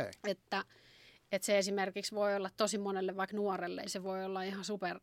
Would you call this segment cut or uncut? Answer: cut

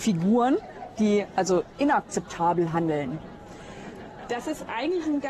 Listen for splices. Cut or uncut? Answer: uncut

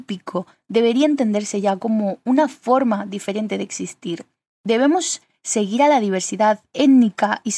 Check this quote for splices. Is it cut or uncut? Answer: uncut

